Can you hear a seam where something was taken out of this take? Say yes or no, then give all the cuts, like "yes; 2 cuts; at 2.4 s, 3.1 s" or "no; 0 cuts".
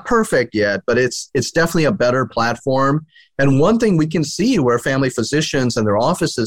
no; 0 cuts